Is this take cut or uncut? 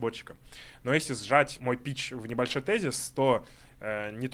cut